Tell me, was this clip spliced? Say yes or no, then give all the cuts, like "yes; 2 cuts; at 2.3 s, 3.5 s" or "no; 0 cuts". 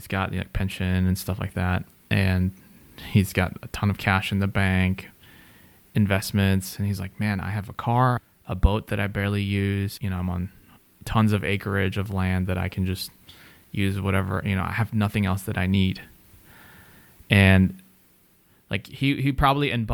no; 0 cuts